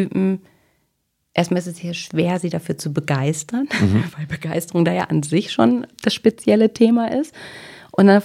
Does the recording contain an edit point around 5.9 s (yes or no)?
yes